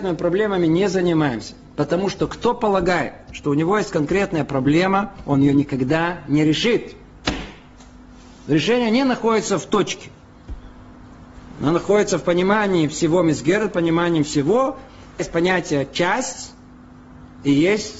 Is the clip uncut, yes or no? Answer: yes